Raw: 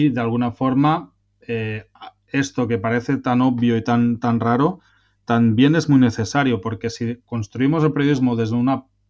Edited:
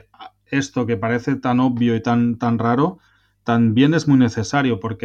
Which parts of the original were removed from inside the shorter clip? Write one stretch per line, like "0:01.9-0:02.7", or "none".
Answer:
none